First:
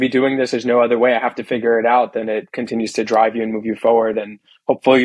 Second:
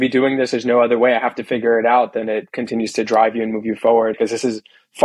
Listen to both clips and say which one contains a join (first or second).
second